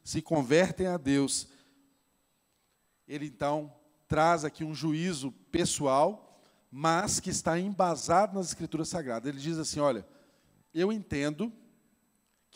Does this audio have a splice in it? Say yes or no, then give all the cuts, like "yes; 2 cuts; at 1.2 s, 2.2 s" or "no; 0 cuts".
no; 0 cuts